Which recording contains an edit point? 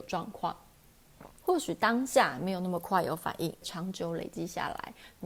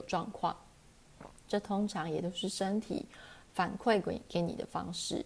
first; 2 cuts; at 1.4 s, 3.6 s

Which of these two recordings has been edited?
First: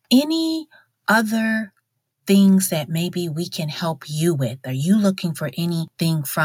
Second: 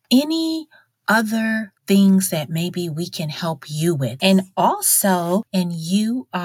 second; 3 cuts; at 1.8 s, 4.2 s, 5.5 s

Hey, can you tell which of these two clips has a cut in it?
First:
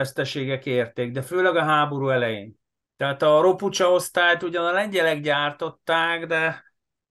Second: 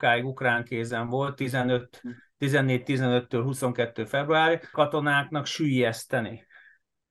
second; 1 cut; at 4.7 s

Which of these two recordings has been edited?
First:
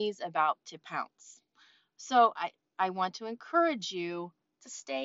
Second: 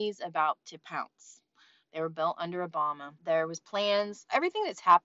second; 2 cuts; at 1.8 s, 3.2 s

